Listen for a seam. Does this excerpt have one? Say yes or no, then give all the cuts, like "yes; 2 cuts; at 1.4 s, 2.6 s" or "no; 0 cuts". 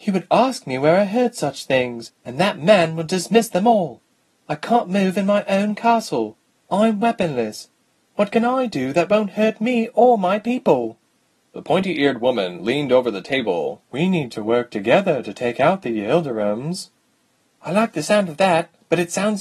yes; 1 cut; at 13.8 s